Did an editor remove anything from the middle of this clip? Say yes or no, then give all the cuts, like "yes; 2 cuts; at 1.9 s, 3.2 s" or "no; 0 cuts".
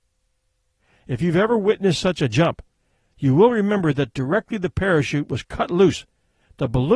no; 0 cuts